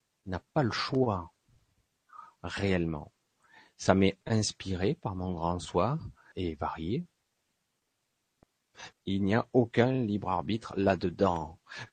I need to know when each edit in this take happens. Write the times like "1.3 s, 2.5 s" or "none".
6.3 s, 8.9 s